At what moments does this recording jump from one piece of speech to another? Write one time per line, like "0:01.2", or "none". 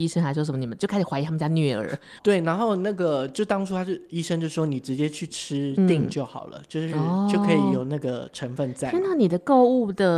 0:02.2